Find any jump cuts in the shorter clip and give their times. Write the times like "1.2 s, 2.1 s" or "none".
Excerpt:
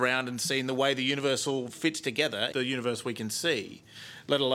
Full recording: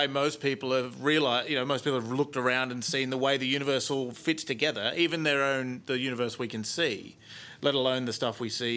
2.5 s